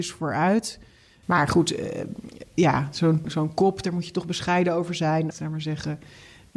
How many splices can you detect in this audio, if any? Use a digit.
3